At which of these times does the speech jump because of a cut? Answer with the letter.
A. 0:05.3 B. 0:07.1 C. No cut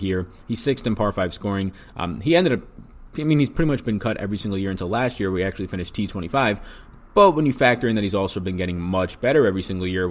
C